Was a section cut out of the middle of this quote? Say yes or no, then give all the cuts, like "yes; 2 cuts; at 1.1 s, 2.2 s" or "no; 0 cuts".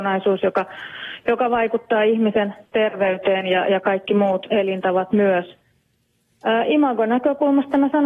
no; 0 cuts